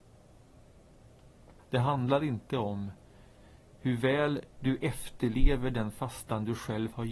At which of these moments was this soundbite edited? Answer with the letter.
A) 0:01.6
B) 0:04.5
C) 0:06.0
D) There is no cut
A